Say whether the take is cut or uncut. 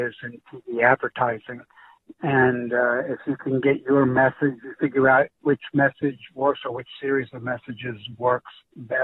uncut